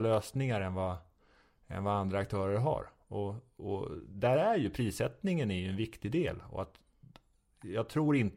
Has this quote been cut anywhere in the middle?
no; 0 cuts

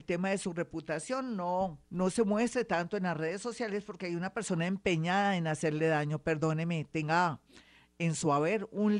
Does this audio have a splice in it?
yes; 1 cut; at 1.8 s

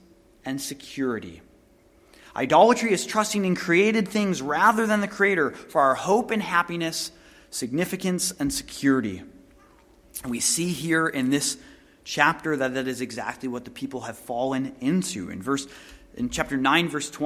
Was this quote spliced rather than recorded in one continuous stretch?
no; 0 cuts

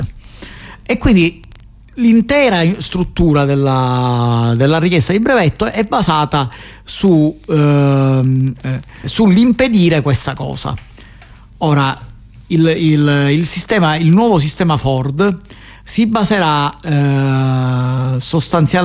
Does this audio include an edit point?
yes; 1 cut; at 9.0 s

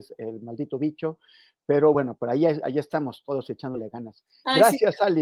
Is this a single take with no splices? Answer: yes; 0 cuts

